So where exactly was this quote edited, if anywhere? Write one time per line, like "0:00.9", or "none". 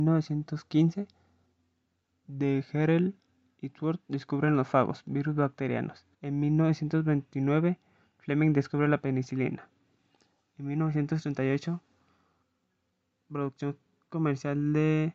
0:06.1